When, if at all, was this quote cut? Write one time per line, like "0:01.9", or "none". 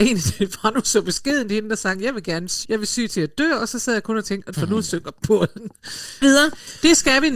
0:02.6
0:04.5
0:06.2